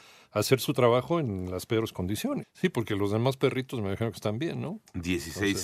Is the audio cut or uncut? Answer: cut